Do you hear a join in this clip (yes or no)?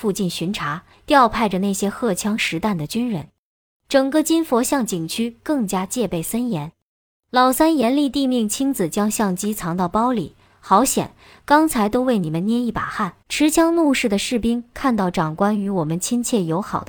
yes